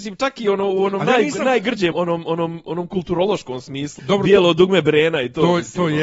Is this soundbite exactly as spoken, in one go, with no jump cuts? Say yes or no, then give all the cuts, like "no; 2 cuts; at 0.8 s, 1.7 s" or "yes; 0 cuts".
no; 2 cuts; at 1.9 s, 4.0 s